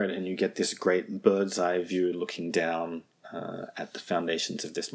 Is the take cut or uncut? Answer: uncut